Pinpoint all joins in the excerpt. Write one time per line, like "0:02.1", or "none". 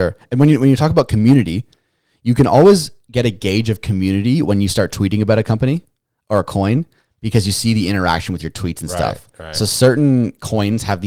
none